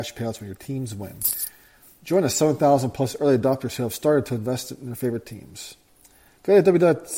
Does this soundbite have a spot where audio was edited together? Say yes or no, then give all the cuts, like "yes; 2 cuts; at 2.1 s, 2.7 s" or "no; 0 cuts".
no; 0 cuts